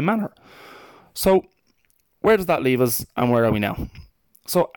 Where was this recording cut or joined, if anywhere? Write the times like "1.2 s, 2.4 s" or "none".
none